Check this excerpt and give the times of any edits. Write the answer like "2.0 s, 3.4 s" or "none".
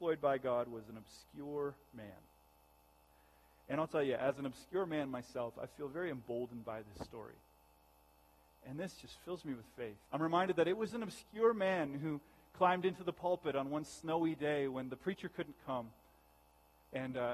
8.5 s, 10.1 s